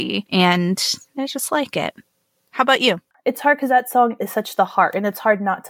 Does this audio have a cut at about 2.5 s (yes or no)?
no